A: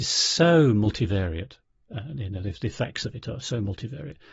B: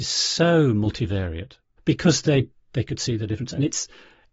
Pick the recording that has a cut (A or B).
B